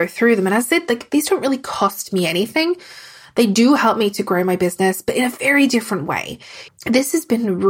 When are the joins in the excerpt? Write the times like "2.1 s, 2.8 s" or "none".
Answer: 6.7 s